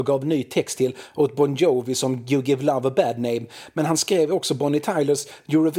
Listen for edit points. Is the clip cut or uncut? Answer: uncut